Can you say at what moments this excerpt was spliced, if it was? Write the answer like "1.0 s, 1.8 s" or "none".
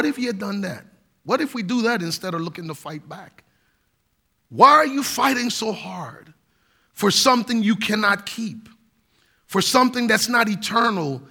none